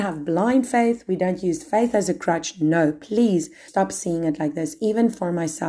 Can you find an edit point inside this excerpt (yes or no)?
yes